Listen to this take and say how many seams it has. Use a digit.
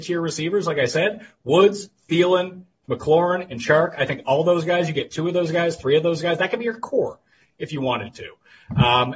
0